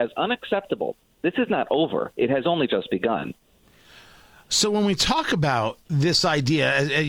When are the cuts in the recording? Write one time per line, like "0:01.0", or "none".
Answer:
0:05.8